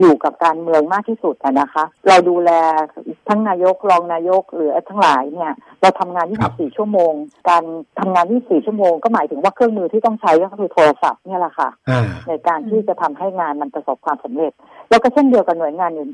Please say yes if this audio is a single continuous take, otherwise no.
yes